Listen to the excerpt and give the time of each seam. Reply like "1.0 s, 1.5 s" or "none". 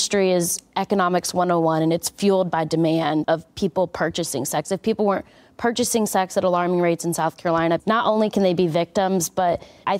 3.2 s, 7.8 s